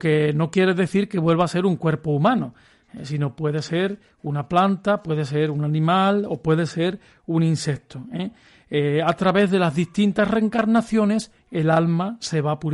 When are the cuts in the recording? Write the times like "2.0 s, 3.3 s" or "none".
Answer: none